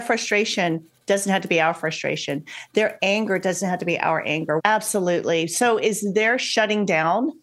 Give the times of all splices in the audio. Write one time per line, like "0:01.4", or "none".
0:04.6

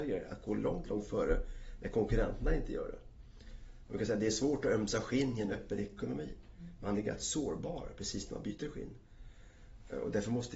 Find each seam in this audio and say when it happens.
none

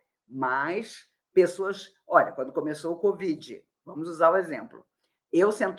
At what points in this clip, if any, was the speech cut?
none

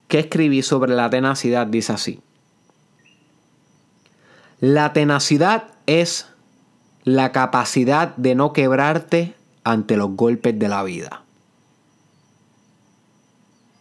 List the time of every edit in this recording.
none

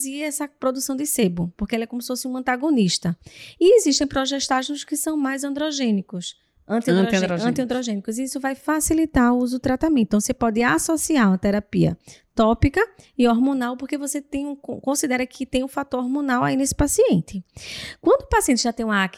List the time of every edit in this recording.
none

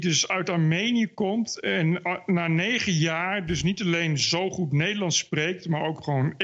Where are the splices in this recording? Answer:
none

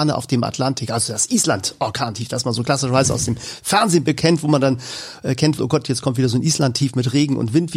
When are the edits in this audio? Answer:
0:05.6

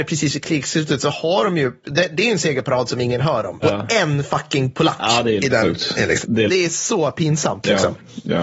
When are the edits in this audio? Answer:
0:03.6
0:06.5

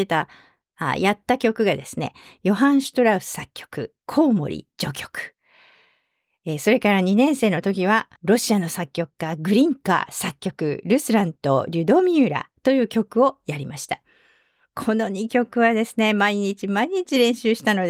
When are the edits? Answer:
0:08.2

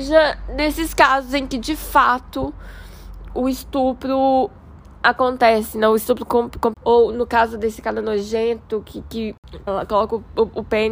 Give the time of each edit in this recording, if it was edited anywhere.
0:06.7
0:09.7

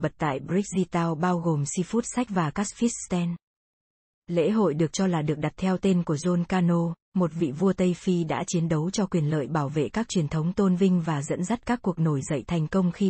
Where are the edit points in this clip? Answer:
0:04.2

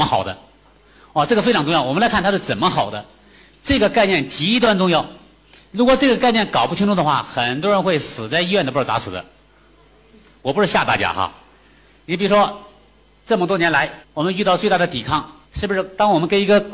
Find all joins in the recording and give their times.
0:14.0
0:15.4

